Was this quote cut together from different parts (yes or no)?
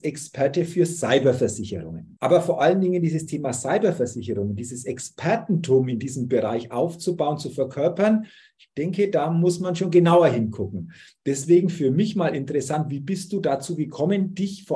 yes